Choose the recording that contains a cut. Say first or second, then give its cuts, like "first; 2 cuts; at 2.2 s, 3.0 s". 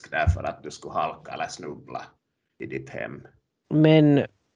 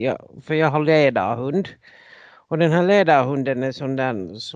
first; 1 cut; at 3.6 s